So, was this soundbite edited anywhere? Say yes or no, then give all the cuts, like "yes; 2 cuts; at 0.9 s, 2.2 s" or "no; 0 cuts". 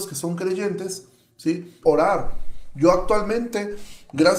yes; 1 cut; at 1.8 s